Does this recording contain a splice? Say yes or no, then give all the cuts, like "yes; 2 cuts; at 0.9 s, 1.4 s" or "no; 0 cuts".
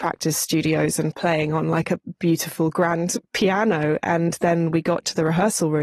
no; 0 cuts